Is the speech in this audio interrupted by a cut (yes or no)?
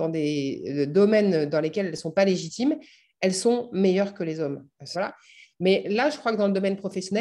yes